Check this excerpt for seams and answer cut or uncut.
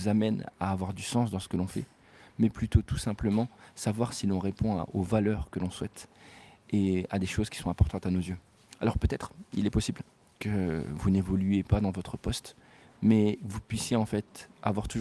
uncut